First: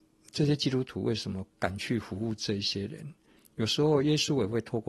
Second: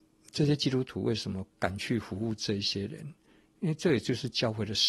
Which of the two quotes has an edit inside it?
first; 1 cut; at 3.4 s

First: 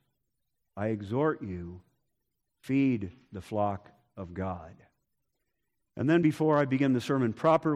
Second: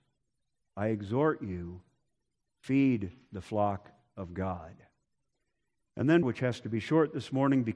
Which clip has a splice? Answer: second; 1 cut; at 6.2 s

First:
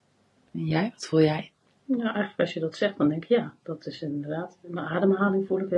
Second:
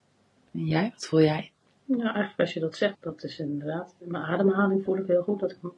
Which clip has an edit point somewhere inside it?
second; 1 cut; at 2.9 s

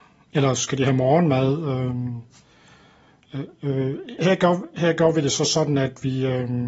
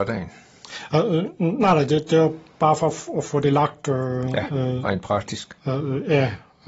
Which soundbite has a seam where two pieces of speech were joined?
first; 1 cut; at 4.2 s

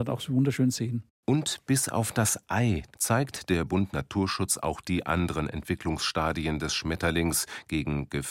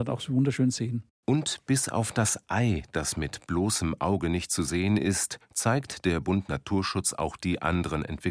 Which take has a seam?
first; 1 cut; at 2.9 s

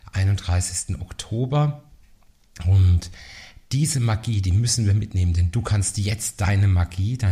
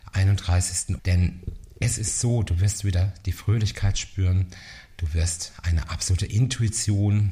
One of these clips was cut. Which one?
second; 1 cut; at 1.0 s

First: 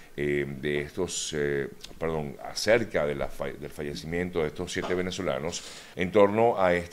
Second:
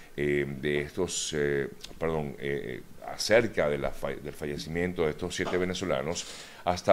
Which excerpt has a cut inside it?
first; 2 cuts; at 2.4 s, 5.9 s

